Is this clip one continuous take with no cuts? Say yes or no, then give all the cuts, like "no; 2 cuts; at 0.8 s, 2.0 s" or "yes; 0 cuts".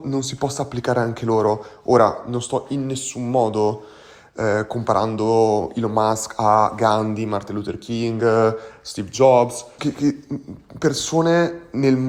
no; 1 cut; at 9.8 s